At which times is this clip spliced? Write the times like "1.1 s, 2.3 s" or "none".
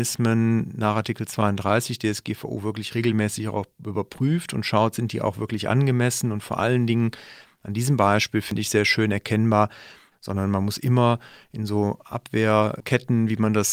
10.1 s